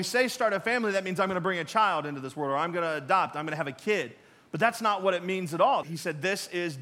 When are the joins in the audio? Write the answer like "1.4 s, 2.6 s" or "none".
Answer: 5.8 s

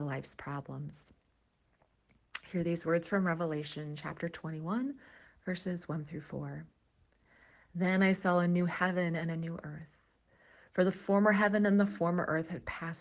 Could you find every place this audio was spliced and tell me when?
none

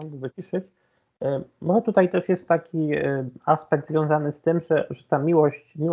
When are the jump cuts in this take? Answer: none

